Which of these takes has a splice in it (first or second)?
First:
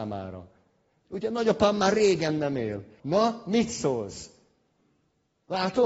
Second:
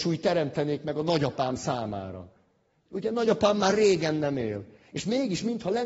first